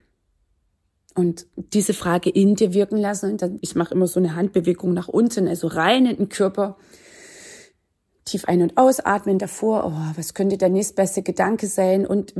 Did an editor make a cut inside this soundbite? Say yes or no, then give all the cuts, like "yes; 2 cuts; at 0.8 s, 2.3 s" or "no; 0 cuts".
yes; 1 cut; at 3.6 s